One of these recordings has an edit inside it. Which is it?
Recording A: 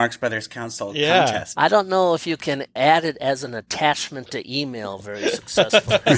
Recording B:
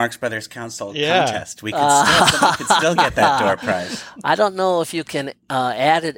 A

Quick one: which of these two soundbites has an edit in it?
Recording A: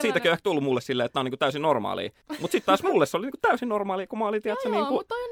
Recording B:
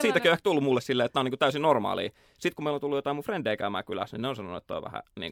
A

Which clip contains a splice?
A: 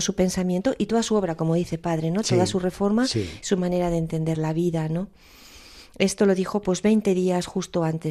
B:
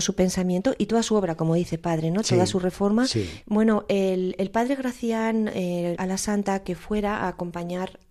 B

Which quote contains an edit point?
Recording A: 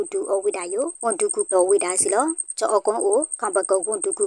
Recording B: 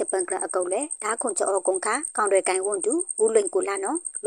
A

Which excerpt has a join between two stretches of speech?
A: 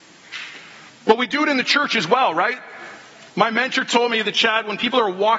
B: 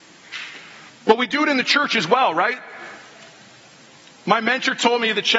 A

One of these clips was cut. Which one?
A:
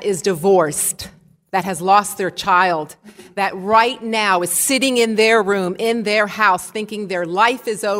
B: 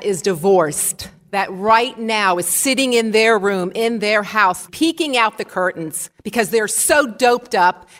B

